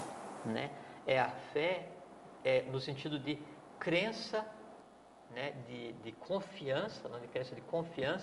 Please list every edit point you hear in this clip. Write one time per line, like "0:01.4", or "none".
none